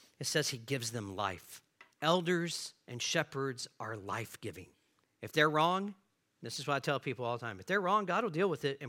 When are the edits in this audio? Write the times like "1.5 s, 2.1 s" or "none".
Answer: 1.9 s, 5.0 s